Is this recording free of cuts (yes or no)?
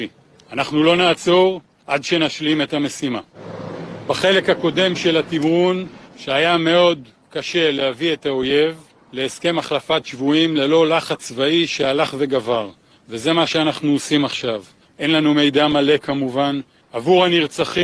no